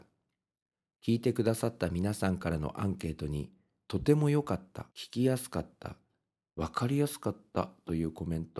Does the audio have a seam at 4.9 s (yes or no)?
yes